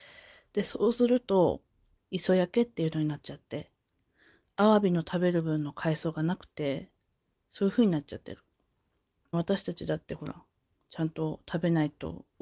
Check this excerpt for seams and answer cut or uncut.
cut